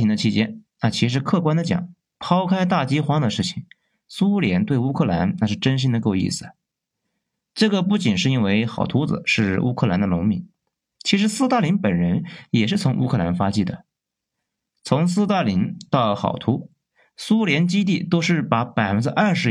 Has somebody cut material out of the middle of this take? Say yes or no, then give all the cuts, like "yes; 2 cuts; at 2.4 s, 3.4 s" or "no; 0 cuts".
no; 0 cuts